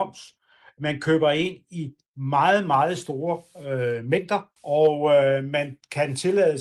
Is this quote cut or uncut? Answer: cut